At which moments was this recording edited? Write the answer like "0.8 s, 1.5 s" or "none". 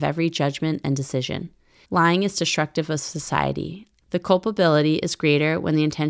1.8 s, 4.0 s